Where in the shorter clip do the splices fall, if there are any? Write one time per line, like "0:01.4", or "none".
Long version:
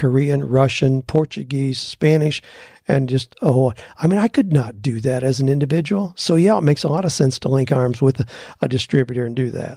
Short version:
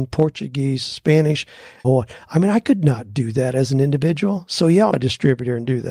0:01.8
0:04.9